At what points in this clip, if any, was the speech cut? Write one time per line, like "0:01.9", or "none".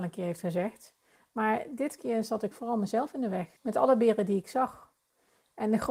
0:03.6